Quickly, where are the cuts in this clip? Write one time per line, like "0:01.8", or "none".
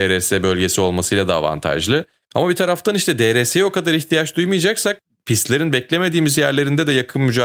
none

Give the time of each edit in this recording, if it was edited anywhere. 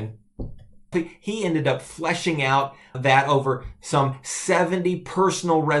0:00.9
0:02.9

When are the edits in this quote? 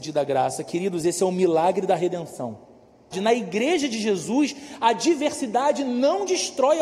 0:03.1

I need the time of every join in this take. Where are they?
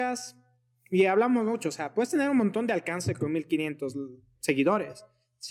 none

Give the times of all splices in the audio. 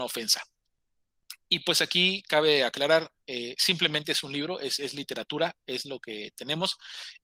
none

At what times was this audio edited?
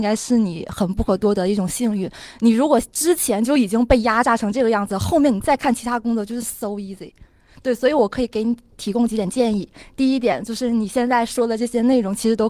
none

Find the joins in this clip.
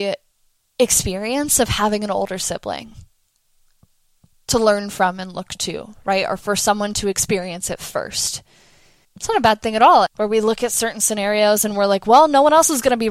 0:09.0
0:10.1

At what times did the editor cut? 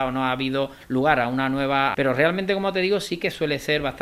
0:01.9

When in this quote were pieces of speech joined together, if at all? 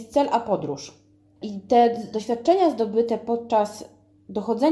none

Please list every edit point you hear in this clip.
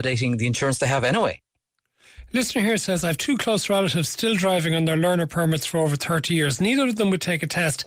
none

